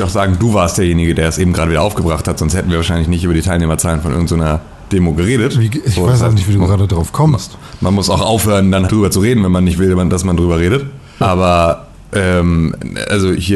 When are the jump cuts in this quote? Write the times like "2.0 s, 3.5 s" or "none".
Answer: 8.9 s, 11.2 s